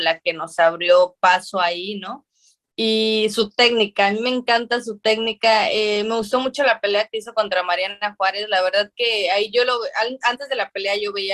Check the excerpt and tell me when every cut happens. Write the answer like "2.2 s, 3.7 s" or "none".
none